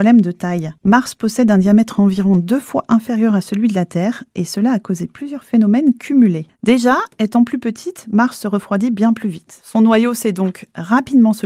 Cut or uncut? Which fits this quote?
uncut